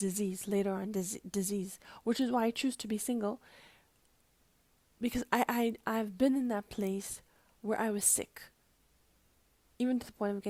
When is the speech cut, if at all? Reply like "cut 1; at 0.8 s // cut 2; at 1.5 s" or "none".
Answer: none